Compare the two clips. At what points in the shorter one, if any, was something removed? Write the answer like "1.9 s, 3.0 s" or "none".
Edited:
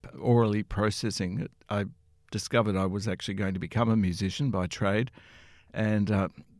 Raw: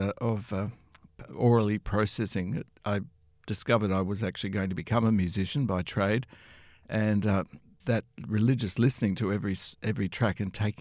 none